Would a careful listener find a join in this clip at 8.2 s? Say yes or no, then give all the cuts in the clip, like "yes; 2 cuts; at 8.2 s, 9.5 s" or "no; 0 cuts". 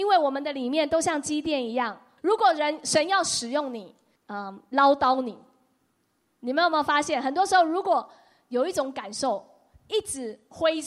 no; 2 cuts; at 2.2 s, 4.2 s